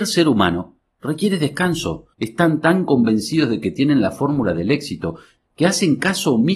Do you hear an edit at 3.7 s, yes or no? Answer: no